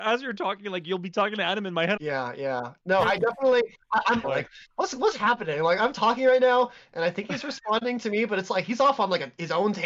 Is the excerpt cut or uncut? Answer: cut